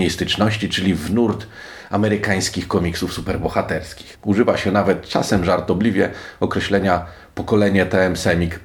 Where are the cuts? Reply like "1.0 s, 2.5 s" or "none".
4.1 s